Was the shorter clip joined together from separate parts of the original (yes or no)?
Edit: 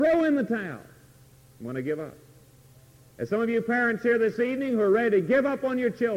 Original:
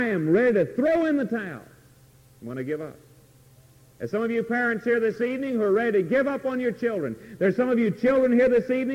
no